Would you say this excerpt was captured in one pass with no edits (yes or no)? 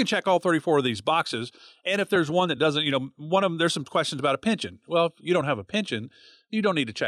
yes